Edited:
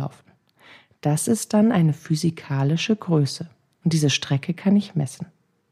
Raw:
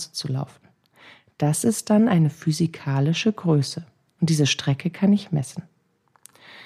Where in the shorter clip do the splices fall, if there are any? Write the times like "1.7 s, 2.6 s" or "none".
none